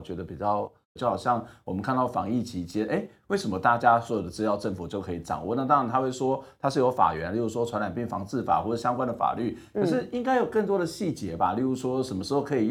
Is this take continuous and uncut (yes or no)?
no